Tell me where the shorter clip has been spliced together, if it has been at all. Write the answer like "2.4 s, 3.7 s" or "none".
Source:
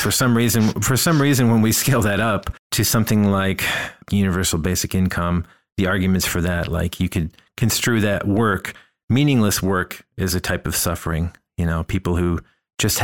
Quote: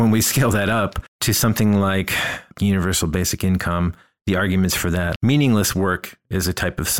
5.2 s